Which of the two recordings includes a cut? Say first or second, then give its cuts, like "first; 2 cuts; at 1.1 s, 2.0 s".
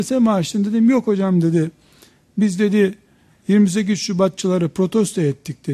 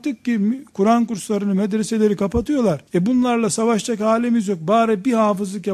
second; 1 cut; at 2.9 s